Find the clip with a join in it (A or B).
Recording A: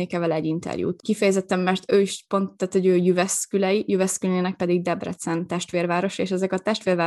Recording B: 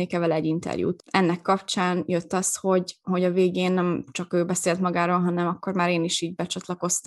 A